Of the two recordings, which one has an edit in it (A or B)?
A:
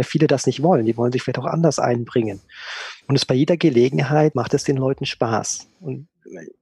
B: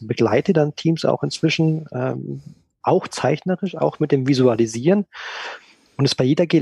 A